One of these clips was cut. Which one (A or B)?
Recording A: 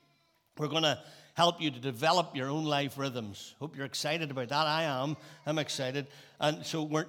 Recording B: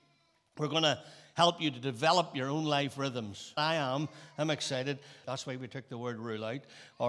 B